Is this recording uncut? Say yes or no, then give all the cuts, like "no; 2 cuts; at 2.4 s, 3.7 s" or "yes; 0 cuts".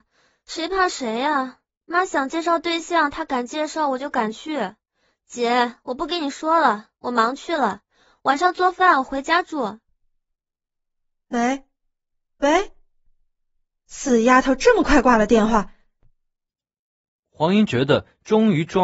yes; 0 cuts